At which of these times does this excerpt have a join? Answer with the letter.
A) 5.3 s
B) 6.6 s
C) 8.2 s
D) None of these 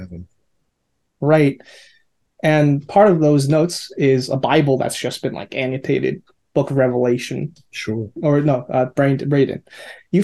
C